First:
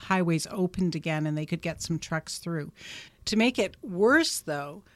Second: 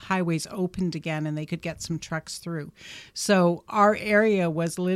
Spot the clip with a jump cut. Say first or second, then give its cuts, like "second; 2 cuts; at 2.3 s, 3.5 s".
first; 1 cut; at 3.1 s